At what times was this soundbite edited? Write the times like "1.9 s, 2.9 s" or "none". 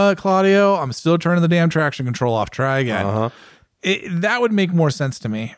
none